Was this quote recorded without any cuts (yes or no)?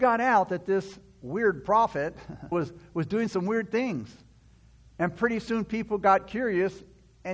no